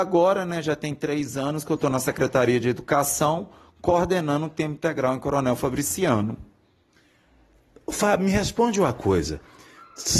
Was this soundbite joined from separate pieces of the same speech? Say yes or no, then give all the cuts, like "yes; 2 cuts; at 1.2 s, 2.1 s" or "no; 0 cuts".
no; 0 cuts